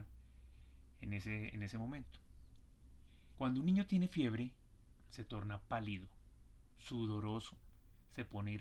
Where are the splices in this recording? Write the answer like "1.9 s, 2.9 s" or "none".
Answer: 3.3 s, 5.1 s